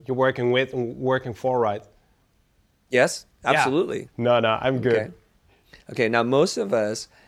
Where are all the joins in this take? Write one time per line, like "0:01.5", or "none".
0:04.1